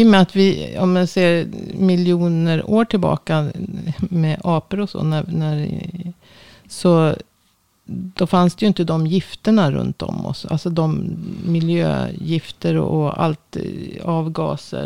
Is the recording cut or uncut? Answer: uncut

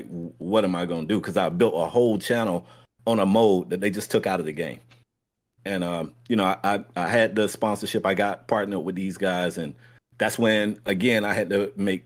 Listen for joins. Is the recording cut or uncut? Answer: uncut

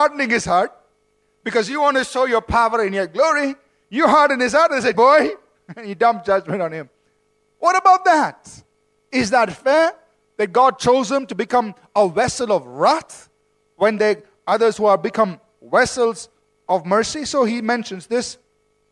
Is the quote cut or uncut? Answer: cut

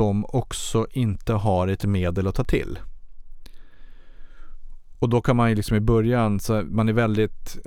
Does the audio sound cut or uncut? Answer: uncut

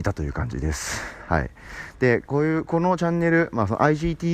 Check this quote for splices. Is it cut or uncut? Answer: uncut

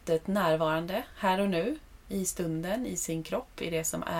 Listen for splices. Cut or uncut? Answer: uncut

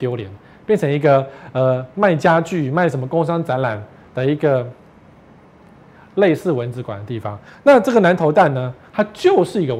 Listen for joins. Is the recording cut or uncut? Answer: uncut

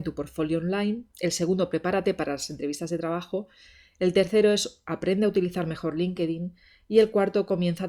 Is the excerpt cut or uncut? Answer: uncut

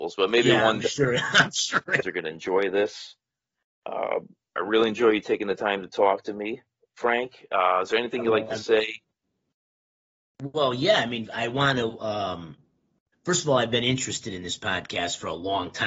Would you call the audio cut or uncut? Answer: cut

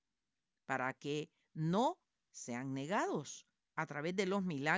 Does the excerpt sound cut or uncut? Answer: cut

